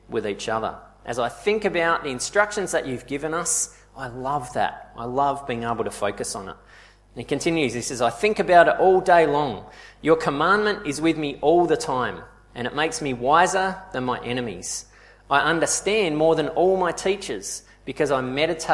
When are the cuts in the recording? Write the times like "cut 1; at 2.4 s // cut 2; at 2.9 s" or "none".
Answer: none